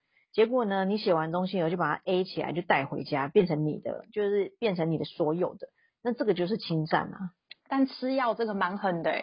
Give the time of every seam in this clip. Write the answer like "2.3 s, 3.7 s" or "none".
none